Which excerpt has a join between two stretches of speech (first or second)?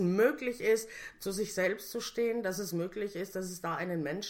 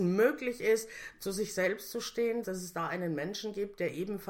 second